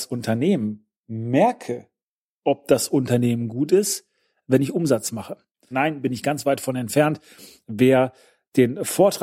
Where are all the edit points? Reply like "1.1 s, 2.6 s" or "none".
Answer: 5.7 s